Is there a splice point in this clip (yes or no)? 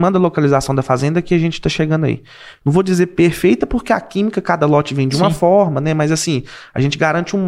yes